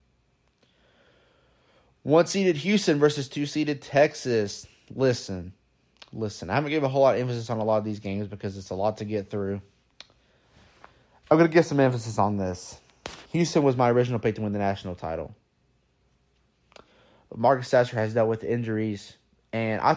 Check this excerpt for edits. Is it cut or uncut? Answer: uncut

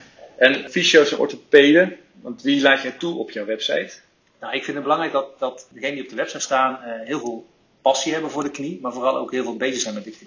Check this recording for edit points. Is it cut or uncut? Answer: uncut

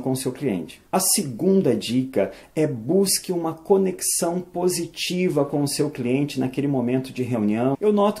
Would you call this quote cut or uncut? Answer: uncut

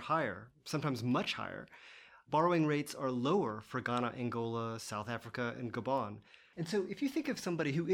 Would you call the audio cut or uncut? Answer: uncut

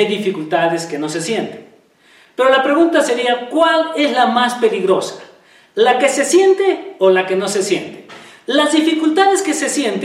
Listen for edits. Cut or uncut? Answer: uncut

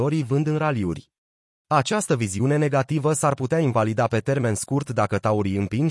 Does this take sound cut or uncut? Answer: cut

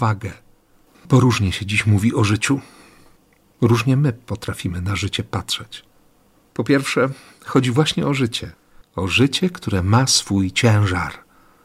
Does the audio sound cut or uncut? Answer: cut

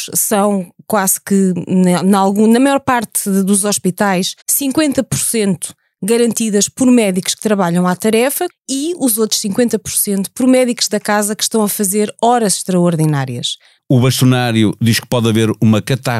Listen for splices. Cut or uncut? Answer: cut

